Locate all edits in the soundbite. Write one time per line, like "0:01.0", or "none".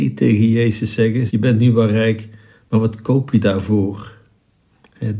0:01.3